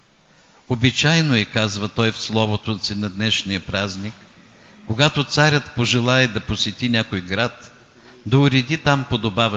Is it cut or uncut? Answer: uncut